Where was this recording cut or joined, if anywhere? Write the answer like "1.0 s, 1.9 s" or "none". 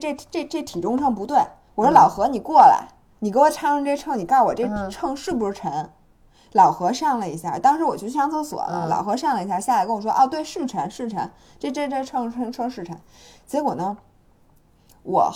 none